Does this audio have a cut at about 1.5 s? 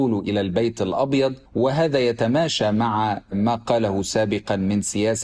yes; 1 cut; at 1.5 s

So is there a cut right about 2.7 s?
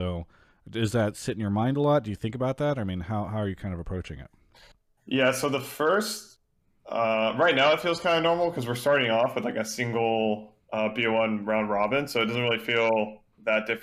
no; 0 cuts

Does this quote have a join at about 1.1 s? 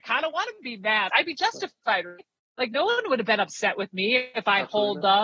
yes; 1 cut; at 1.1 s

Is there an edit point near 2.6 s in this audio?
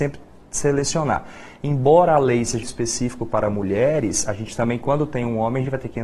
yes; 1 cut; at 2.6 s

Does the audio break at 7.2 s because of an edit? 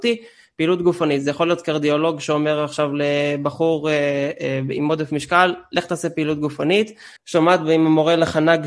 yes; 1 cut; at 7.2 s

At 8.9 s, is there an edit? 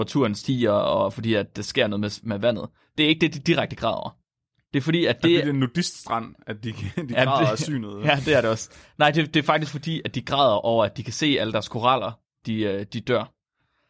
no; 0 cuts

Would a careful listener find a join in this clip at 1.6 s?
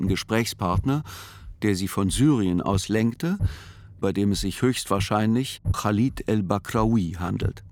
no; 2 cuts; at 4.0 s, 5.7 s

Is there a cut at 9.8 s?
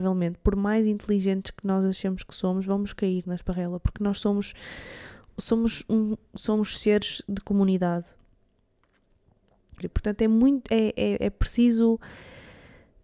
yes; 1 cut; at 9.8 s

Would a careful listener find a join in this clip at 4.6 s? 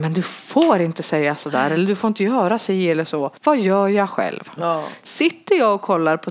yes; 2 cuts; at 3.3 s, 4.6 s

